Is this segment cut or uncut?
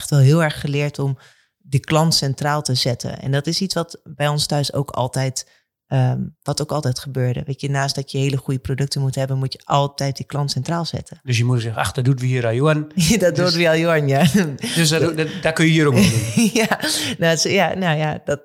uncut